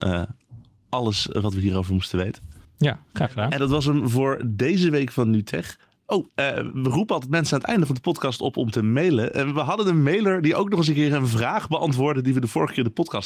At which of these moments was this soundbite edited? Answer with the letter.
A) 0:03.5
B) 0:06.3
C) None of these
B